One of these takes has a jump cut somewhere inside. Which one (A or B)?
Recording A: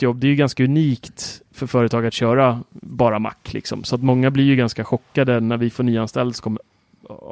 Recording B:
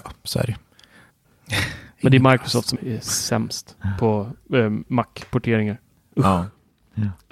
B